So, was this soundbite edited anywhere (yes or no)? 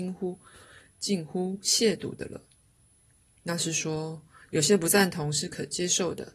no